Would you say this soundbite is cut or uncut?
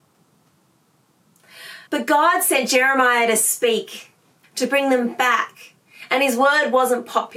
cut